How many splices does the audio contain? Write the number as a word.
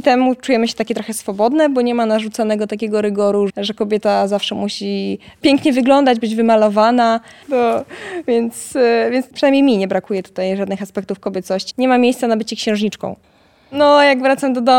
three